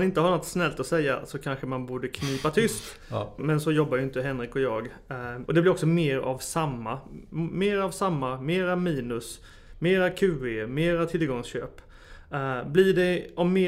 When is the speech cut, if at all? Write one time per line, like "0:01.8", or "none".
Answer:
0:03.4
0:05.5